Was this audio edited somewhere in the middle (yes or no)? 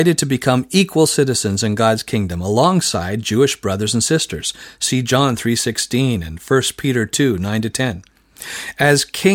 no